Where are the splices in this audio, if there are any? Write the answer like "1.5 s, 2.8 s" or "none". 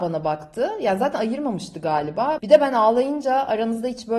2.4 s